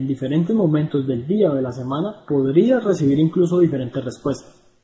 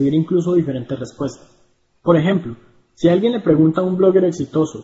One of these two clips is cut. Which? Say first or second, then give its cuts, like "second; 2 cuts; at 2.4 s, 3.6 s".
second; 1 cut; at 1.9 s